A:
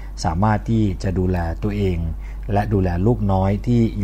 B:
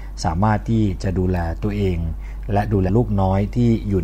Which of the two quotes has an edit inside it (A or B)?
B